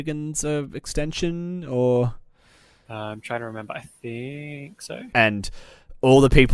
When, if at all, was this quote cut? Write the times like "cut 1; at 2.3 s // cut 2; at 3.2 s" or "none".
cut 1; at 5.1 s